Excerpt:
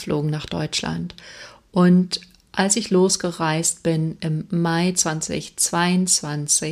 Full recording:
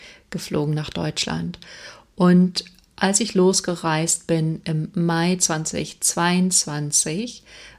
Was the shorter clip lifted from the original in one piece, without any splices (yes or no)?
yes